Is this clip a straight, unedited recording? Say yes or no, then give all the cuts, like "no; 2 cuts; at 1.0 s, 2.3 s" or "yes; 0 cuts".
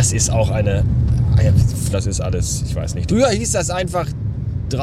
no; 2 cuts; at 1.9 s, 3.1 s